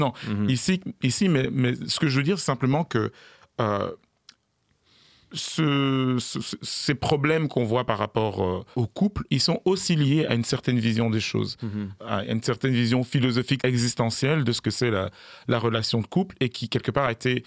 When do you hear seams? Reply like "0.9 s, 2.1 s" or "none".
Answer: 8.7 s, 12.0 s, 13.6 s